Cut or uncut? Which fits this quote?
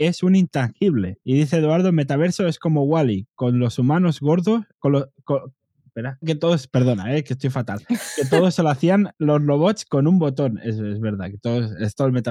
cut